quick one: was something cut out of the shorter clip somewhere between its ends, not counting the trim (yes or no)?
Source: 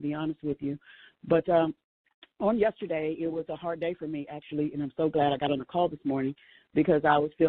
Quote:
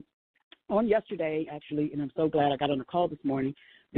yes